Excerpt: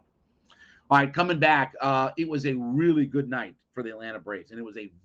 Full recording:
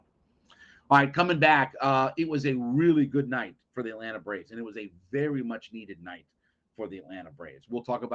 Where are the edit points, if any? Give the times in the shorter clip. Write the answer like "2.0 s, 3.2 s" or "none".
none